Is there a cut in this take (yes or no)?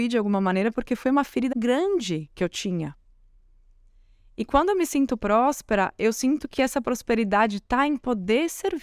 yes